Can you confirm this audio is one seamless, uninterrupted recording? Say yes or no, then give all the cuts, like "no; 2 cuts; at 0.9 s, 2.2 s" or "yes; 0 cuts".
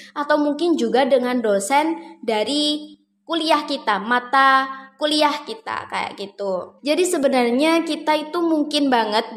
no; 1 cut; at 6.8 s